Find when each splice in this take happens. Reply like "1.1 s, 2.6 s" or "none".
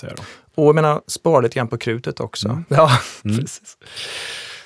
2.7 s